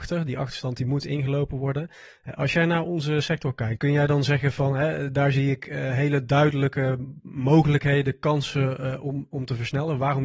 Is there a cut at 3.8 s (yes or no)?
yes